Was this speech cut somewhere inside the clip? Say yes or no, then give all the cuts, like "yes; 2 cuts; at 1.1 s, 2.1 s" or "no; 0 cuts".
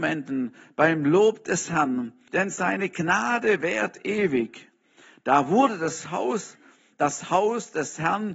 yes; 1 cut; at 2.3 s